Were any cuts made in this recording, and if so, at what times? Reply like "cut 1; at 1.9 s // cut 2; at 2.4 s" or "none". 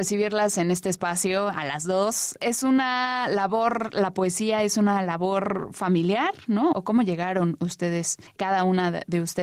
cut 1; at 6.7 s